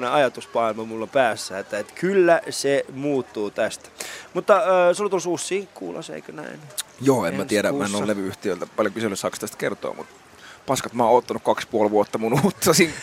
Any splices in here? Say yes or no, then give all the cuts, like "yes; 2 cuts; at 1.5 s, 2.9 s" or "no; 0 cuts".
no; 0 cuts